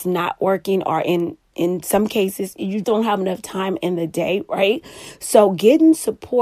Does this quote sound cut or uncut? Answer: cut